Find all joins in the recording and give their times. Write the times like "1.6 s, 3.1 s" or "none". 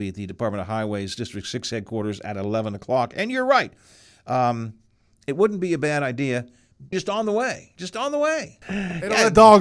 6.9 s, 8.6 s